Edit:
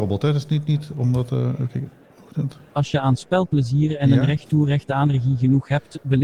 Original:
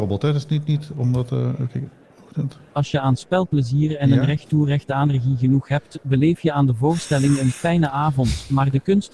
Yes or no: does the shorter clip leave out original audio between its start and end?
no